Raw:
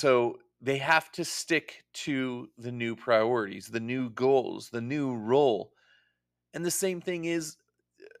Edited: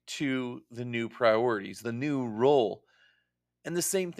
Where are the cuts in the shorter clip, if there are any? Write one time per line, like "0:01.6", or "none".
0:01.8